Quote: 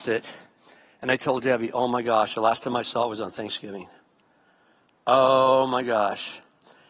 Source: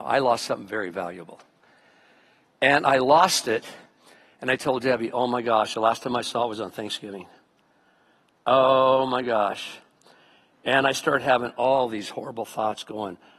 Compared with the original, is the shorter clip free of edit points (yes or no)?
yes